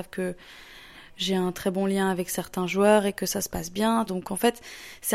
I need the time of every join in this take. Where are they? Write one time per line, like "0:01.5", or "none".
0:04.1